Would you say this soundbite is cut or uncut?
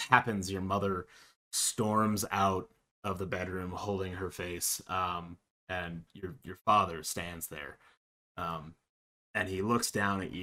uncut